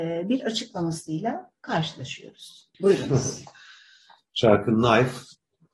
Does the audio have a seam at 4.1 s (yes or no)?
no